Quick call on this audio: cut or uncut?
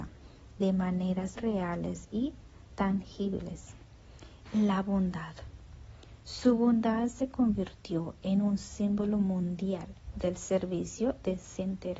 cut